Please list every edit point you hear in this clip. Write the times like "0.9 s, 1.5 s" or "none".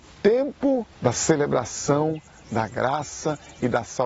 0.9 s